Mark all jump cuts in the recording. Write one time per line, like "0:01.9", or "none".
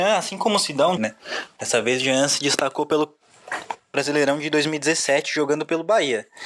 0:01.0